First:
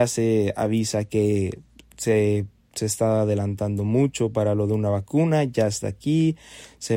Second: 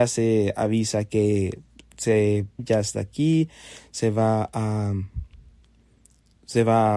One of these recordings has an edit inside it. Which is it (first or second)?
second